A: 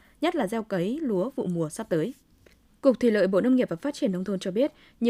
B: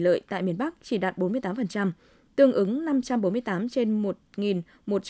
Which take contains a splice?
A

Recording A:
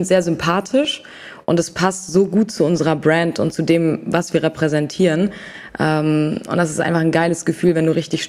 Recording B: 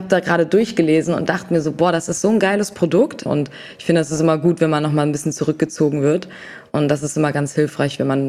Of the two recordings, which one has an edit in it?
B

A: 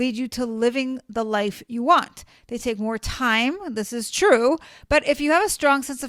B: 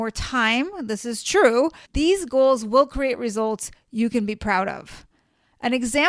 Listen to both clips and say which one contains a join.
B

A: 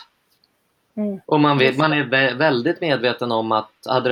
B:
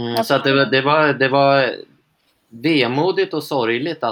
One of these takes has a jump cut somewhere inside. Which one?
A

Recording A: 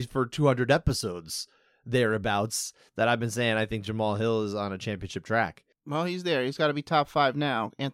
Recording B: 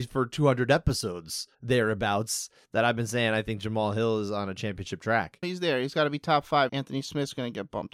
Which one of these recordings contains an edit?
B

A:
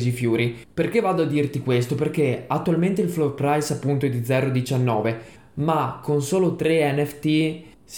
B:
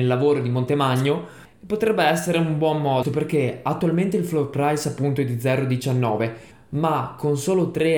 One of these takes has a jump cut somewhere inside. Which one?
B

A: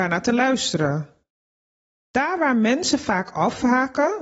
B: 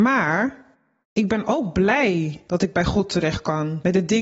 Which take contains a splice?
B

